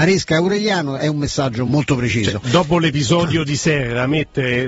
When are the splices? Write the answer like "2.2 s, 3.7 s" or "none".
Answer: 1.7 s